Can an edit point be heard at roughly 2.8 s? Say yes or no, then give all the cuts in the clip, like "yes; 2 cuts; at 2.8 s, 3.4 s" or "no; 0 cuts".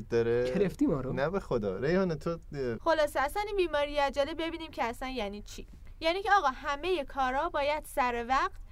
yes; 1 cut; at 2.8 s